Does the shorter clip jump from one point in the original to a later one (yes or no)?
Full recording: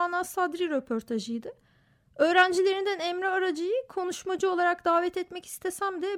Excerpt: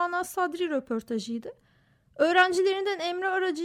no